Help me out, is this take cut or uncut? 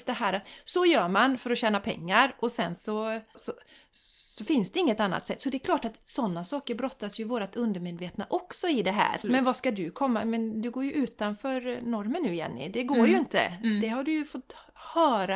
cut